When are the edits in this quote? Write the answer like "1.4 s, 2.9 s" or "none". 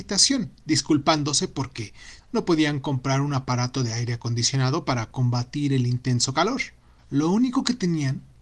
2.2 s, 7.0 s